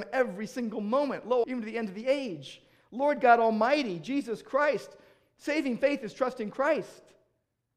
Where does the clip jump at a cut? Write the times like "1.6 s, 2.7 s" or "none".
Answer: 1.4 s